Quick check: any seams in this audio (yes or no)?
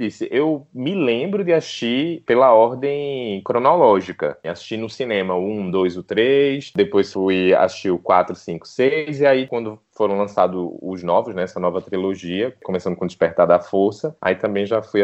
no